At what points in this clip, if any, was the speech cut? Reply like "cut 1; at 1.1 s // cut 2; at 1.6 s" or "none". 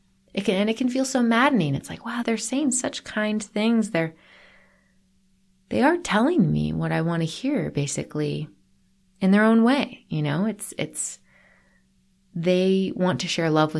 cut 1; at 2.2 s